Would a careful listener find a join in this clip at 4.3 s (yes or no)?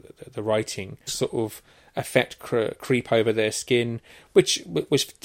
no